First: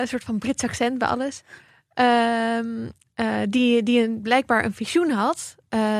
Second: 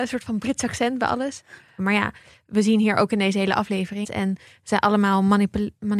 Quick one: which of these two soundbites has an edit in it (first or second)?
second